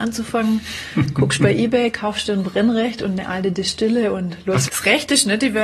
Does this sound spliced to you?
yes; 1 cut; at 4.7 s

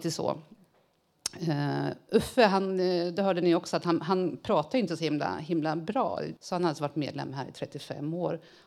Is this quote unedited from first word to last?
no; 1 cut; at 6.4 s

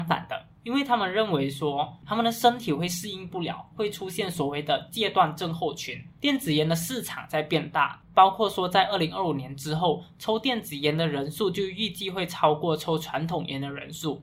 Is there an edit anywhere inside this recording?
yes; 2 cuts; at 2.0 s, 6.2 s

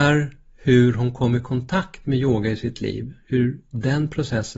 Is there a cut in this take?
no; 0 cuts

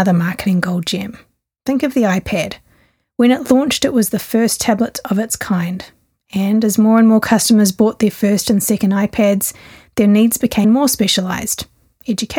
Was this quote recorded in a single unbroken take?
no; 1 cut; at 10.6 s

